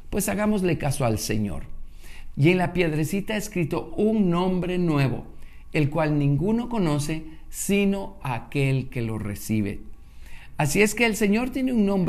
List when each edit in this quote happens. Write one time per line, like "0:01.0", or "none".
0:02.3